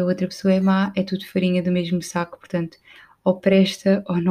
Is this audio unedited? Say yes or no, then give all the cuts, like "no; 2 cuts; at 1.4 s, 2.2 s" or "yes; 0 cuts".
yes; 0 cuts